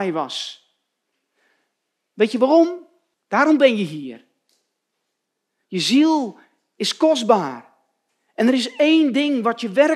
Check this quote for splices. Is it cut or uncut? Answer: cut